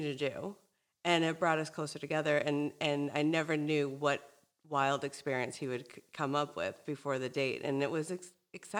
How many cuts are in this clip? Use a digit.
0